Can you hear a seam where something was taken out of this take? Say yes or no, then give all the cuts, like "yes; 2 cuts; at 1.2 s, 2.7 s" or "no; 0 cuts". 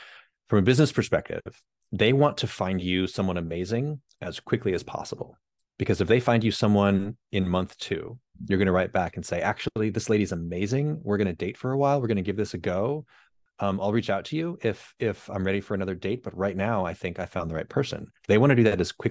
no; 0 cuts